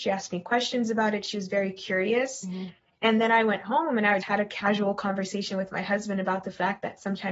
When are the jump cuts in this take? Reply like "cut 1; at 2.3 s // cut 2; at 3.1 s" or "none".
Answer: cut 1; at 4.2 s